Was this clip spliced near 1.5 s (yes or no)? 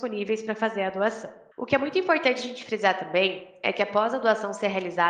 yes